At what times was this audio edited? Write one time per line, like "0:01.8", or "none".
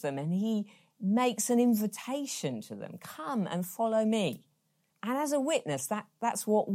0:04.9